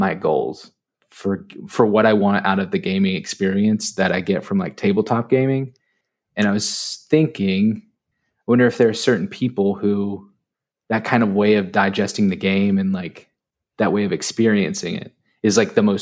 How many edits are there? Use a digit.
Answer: 1